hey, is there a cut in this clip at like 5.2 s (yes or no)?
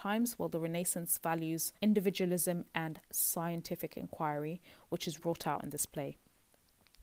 yes